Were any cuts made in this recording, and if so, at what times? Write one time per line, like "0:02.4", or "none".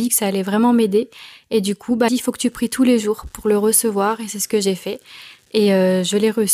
0:02.1